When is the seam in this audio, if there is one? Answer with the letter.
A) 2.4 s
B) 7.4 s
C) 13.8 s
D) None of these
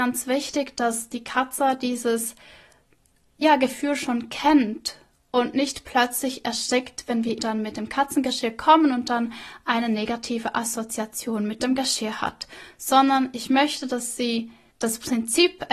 B